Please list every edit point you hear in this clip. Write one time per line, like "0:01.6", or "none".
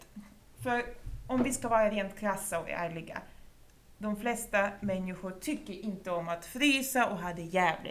none

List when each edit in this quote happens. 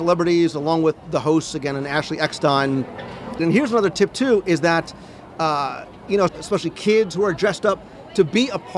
0:03.4
0:06.3

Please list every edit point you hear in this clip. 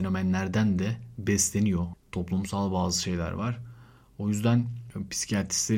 0:01.9

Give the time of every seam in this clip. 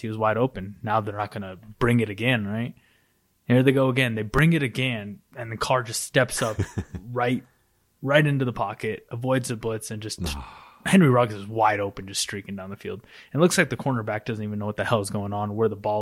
none

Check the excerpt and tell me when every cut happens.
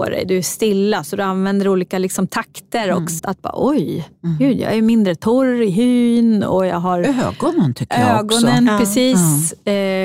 0:03.2

